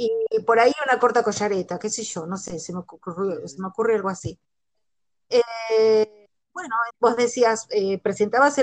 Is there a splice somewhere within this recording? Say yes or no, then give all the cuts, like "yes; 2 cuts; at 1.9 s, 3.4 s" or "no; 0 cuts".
yes; 1 cut; at 6.9 s